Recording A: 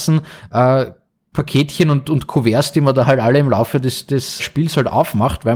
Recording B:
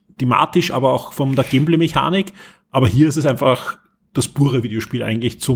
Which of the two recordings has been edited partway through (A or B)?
A